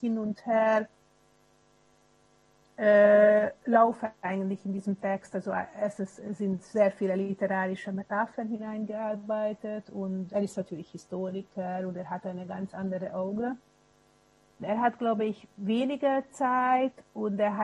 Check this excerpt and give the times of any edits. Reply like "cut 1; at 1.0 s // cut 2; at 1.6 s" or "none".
cut 1; at 10.3 s // cut 2; at 14.6 s